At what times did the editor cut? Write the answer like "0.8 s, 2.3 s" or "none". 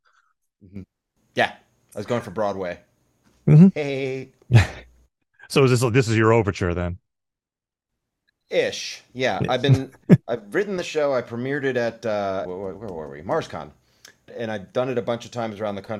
12.4 s, 14.3 s